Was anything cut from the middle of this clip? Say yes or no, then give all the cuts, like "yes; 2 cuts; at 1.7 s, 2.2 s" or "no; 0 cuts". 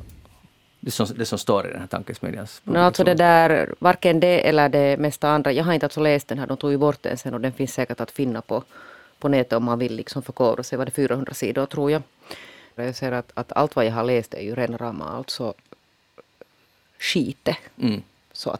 yes; 1 cut; at 12.8 s